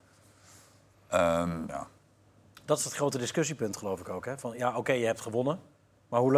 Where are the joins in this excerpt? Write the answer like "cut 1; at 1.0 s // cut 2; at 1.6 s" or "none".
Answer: cut 1; at 1.7 s

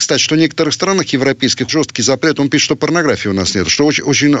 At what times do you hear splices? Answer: cut 1; at 1.7 s

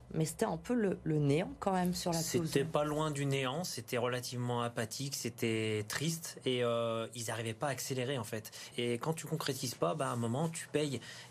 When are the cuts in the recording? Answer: cut 1; at 8.7 s

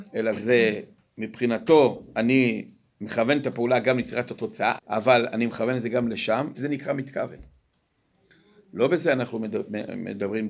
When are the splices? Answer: cut 1; at 4.8 s // cut 2; at 6.5 s

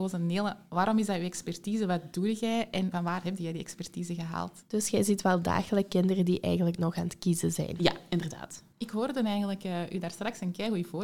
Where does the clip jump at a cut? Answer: cut 1; at 2.9 s // cut 2; at 4.7 s

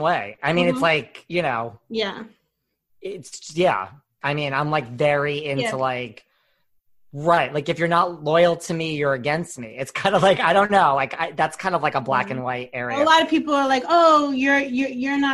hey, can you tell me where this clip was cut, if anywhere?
none

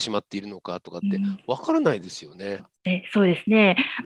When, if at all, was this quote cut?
cut 1; at 2.6 s

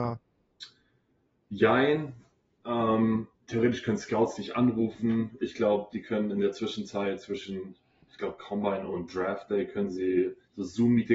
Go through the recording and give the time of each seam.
cut 1; at 3.4 s

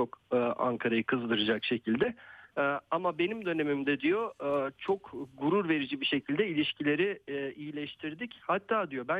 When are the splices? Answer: cut 1; at 2.5 s

